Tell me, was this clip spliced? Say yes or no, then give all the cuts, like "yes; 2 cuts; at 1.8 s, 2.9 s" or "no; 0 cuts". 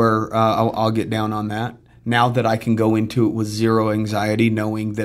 no; 0 cuts